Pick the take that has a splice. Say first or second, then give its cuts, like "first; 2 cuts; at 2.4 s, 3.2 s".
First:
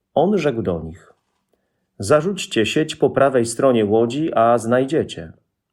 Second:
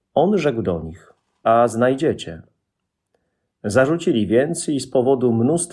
second; 1 cut; at 1.4 s